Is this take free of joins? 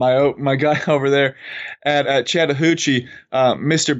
no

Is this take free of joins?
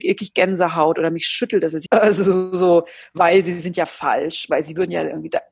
no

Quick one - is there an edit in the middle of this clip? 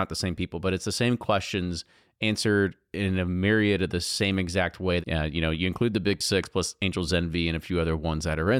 yes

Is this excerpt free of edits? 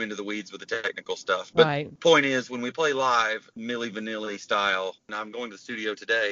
no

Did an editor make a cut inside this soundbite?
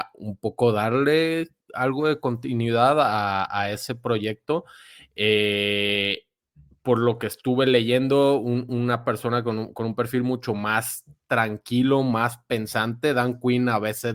no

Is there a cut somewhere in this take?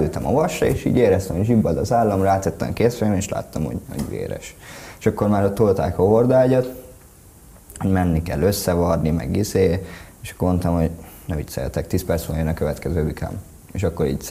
yes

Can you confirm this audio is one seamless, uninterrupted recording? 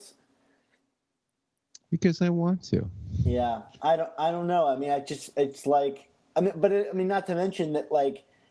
yes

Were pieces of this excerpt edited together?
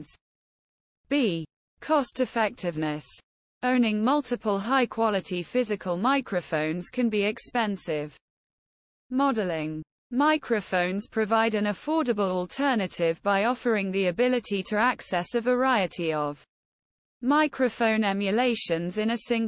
no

